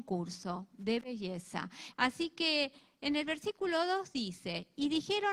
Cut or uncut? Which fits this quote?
cut